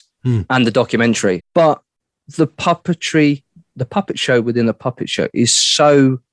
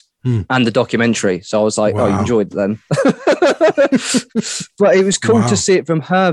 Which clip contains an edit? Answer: first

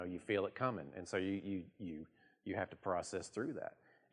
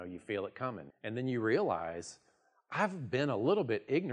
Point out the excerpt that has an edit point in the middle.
second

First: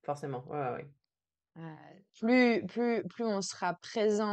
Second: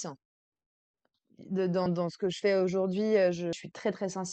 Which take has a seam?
second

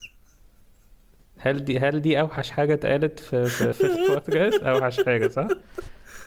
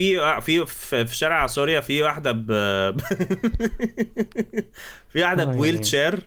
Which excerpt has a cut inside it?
first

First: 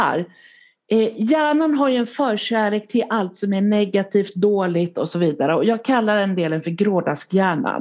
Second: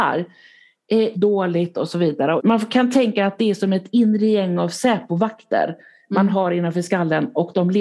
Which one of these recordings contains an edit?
second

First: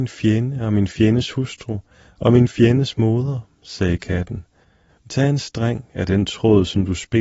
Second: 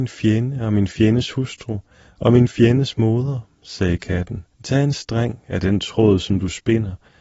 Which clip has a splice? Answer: second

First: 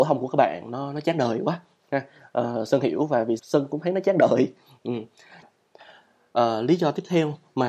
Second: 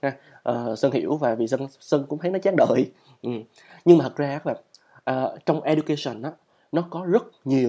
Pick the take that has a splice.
first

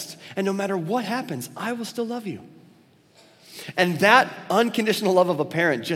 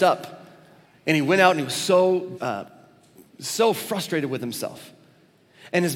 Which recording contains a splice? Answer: second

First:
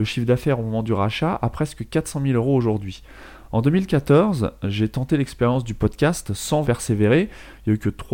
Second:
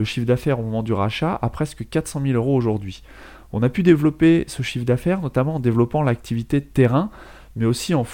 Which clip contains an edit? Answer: first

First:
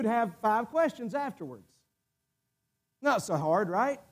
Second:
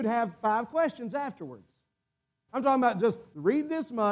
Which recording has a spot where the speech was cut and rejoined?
second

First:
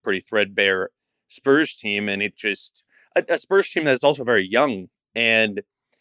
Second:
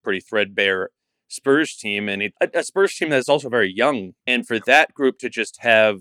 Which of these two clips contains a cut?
second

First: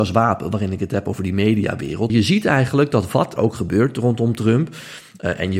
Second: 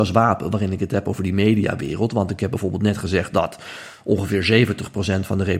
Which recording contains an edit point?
first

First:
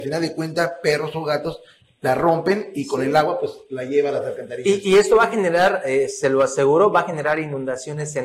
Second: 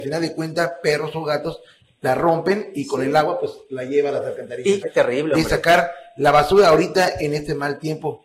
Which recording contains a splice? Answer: second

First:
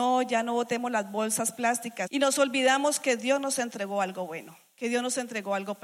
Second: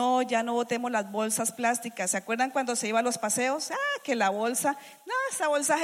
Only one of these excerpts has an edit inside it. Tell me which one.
first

